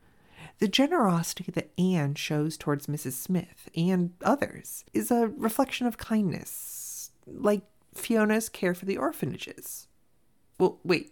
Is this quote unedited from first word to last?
no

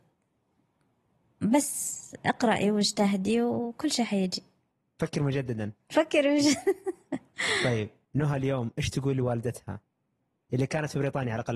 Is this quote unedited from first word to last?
yes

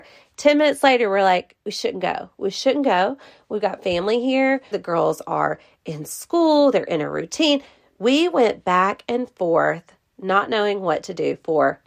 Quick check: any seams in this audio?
yes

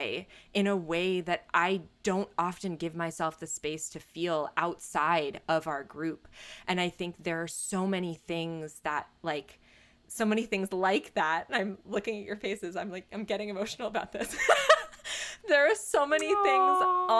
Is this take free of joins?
yes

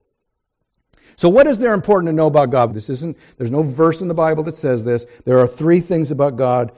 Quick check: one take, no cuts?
no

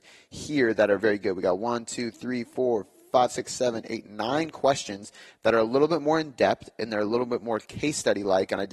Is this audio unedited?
no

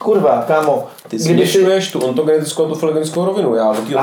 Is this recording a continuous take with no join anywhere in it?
yes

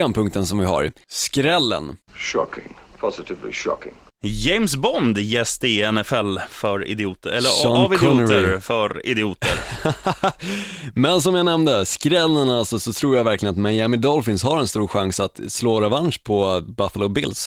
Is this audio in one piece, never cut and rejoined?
yes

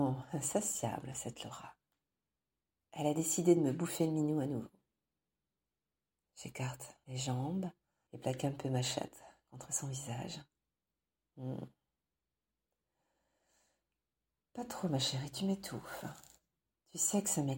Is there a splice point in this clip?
no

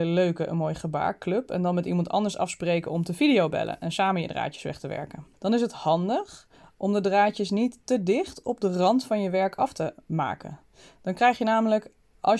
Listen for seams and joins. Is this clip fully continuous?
no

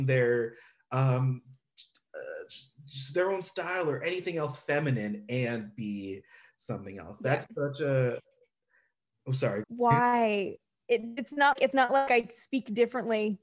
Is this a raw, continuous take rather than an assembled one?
no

